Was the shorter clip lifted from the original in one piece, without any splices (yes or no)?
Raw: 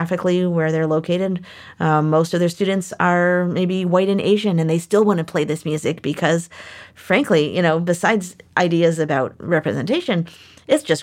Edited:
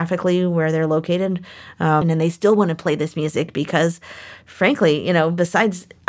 no